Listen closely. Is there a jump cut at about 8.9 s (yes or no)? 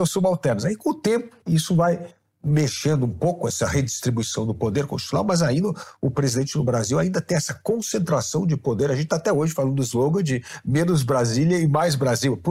no